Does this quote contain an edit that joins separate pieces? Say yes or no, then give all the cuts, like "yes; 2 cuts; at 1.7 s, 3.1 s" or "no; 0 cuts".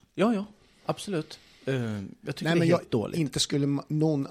yes; 1 cut; at 2.8 s